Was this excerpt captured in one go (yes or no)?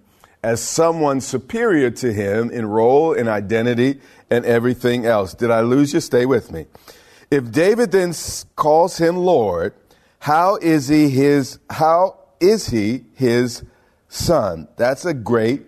yes